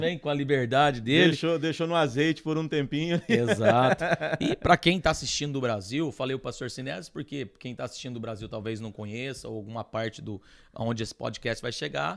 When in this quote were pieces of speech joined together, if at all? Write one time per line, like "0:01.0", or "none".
none